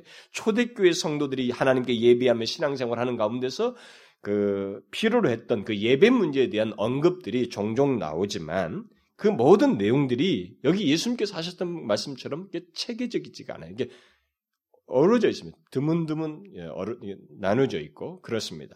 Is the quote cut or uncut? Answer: uncut